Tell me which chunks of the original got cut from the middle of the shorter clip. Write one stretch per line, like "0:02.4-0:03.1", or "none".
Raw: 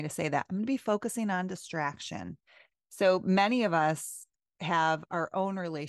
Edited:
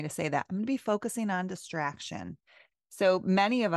none